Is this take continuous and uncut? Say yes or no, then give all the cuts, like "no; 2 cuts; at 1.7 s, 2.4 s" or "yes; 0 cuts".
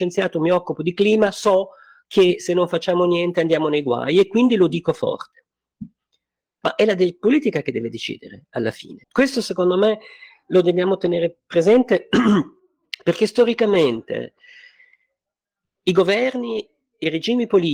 no; 2 cuts; at 6.6 s, 9.0 s